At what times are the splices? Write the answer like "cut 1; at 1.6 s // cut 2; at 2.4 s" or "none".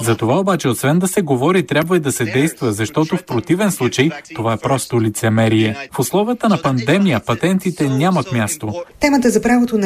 none